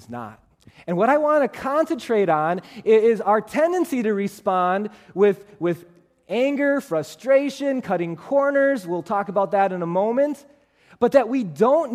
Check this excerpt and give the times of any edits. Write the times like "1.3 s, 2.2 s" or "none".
none

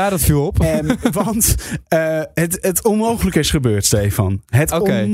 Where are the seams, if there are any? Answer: none

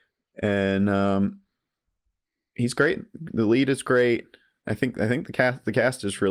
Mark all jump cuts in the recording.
none

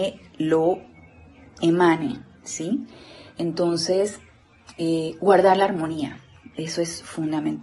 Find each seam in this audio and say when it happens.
none

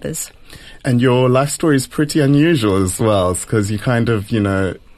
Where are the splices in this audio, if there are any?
none

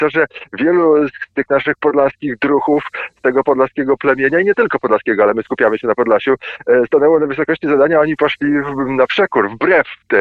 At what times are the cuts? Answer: none

